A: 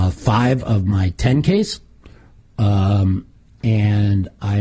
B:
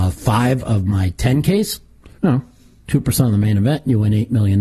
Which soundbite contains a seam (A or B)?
B